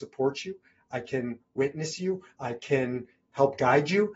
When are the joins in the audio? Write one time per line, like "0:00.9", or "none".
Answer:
none